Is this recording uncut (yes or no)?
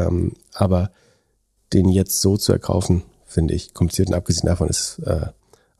yes